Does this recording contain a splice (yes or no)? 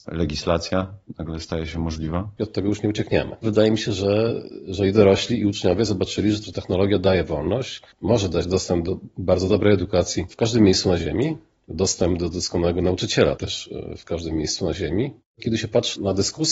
yes